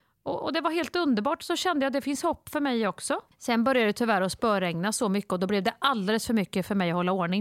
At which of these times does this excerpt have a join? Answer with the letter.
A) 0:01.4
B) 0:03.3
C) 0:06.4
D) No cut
B